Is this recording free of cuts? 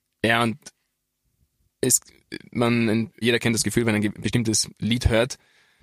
no; 1 cut; at 3.2 s

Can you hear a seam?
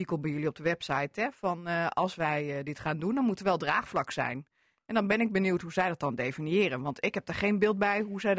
no; 0 cuts

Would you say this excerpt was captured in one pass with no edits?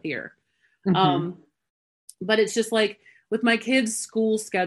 yes; 0 cuts

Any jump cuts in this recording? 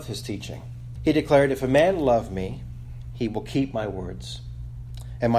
yes; 1 cut; at 1.0 s

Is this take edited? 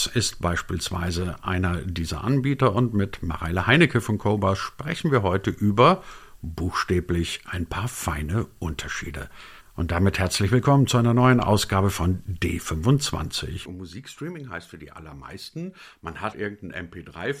yes; 2 cuts; at 13.7 s, 16.3 s

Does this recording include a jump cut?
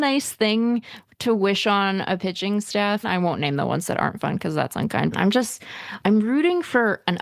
yes; 2 cuts; at 3.0 s, 5.1 s

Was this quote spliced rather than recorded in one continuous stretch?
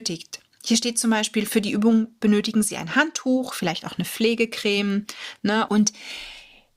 yes; 1 cut; at 5.7 s

